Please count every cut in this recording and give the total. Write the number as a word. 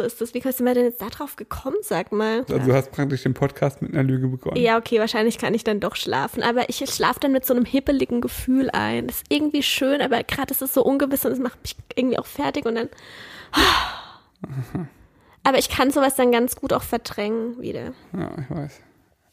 one